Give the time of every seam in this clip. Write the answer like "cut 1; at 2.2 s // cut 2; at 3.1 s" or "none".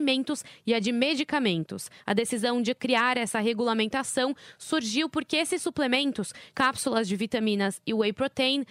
cut 1; at 2.0 s // cut 2; at 6.5 s